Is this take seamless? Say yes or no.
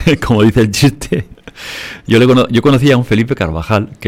yes